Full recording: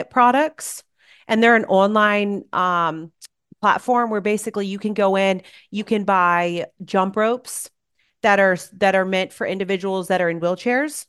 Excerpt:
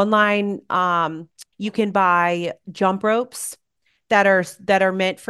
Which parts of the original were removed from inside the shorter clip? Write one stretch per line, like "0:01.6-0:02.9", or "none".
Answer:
0:03.4-0:05.7